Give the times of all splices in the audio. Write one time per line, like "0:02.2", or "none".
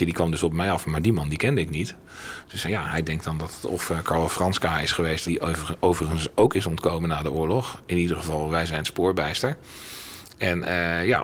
0:02.6
0:05.3